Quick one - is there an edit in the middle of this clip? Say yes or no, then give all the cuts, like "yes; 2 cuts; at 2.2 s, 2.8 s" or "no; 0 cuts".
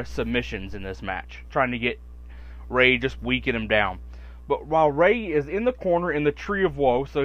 yes; 1 cut; at 1.5 s